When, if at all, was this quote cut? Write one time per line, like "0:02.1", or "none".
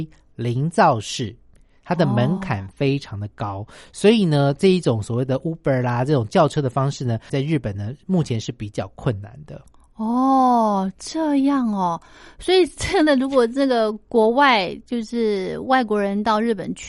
0:07.3